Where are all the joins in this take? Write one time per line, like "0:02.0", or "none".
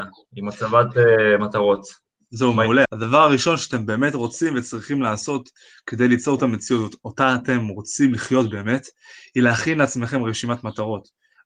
0:02.8

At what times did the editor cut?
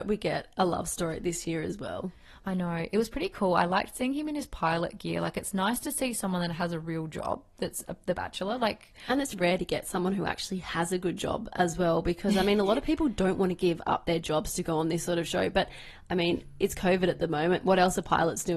0:09.3

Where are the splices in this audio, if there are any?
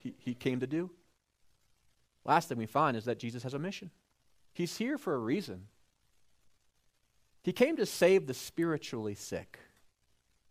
none

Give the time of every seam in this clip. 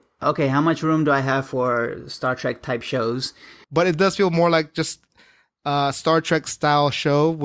0:03.6

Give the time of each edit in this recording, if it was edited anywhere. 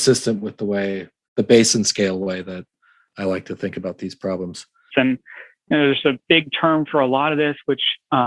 0:04.9
0:06.2

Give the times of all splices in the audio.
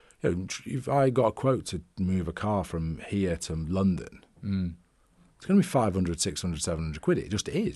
none

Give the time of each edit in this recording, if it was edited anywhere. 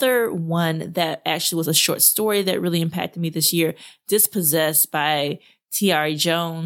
none

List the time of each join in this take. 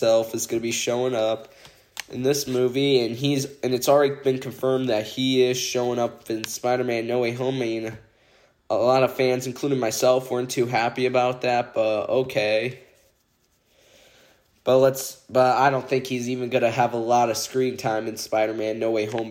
none

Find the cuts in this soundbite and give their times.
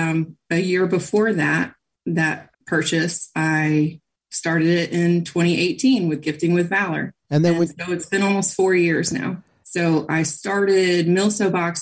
0:02.5
0:07.2
0:09.6

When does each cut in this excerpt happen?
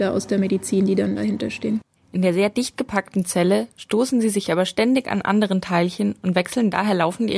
0:02.0

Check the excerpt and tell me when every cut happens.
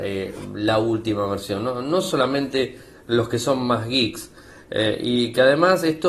none

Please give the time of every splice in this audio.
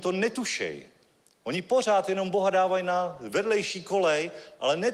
none

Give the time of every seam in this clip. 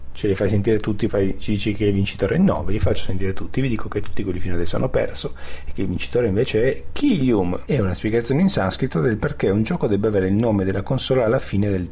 0:01.1
0:07.7

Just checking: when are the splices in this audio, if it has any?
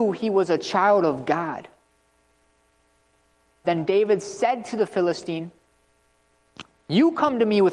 0:03.6

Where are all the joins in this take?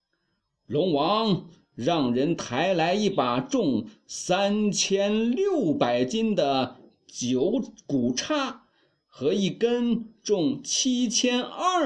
none

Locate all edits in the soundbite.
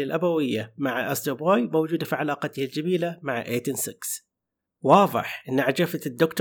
none

